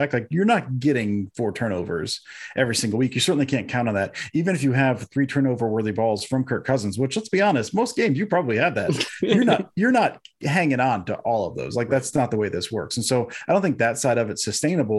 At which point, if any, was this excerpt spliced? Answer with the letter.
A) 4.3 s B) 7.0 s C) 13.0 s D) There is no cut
D